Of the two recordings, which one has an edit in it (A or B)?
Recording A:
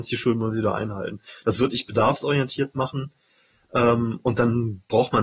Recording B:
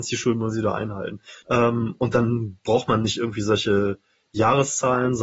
B